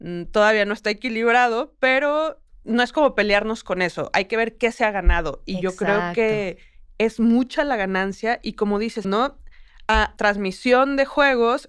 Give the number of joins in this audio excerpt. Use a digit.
2